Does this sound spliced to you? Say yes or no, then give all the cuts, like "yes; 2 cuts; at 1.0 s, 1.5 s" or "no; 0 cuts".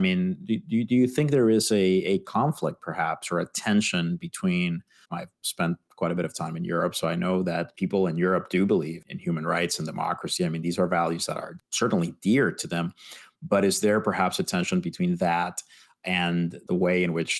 yes; 1 cut; at 5.0 s